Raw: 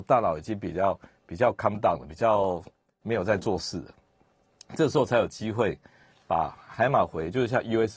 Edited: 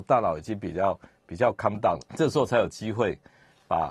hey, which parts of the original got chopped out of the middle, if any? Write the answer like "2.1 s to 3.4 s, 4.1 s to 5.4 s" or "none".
2.0 s to 4.6 s